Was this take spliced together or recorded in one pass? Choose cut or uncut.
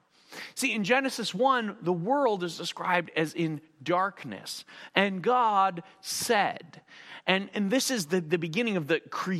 cut